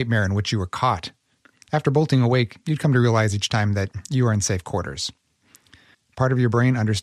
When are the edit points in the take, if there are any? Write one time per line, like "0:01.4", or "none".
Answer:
0:05.9